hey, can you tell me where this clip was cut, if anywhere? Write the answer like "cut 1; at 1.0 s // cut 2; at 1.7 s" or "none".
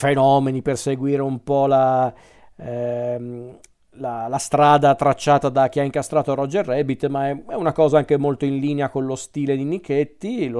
none